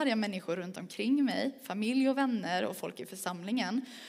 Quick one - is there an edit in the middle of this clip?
no; 0 cuts

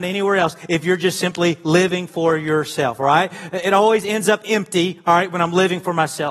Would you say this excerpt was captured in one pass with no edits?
yes; 0 cuts

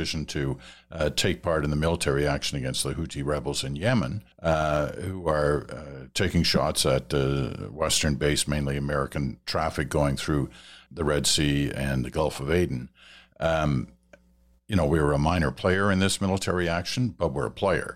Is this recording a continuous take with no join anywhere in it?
no; 2 cuts; at 4.3 s, 10.9 s

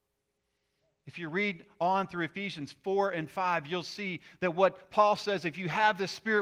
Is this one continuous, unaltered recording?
yes; 0 cuts

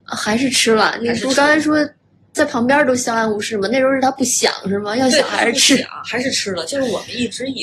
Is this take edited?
no; 0 cuts

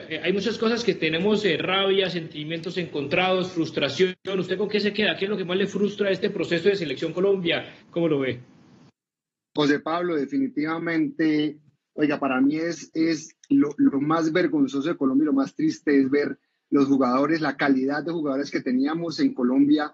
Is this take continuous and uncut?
no; 1 cut; at 7.8 s

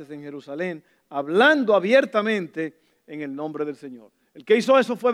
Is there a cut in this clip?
no; 0 cuts

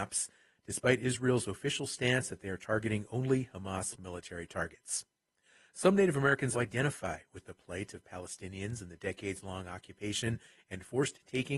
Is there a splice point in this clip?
yes; 1 cut; at 6.5 s

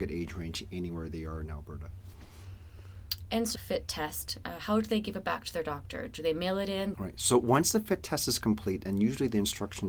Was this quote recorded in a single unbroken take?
no; 2 cuts; at 3.6 s, 6.9 s

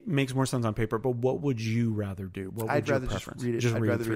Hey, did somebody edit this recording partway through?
no; 0 cuts

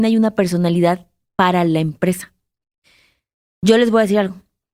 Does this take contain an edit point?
no; 0 cuts

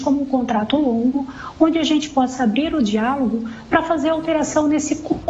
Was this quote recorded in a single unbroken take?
yes; 0 cuts

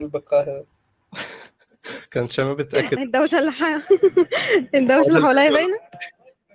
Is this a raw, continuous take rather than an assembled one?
no; 1 cut; at 3.0 s

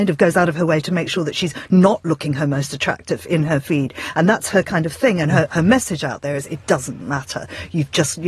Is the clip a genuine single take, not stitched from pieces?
yes; 0 cuts

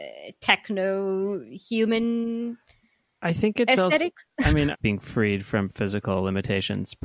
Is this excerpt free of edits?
no; 1 cut; at 4.7 s

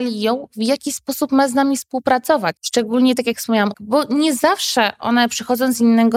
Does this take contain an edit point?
yes; 2 cuts; at 2.6 s, 3.7 s

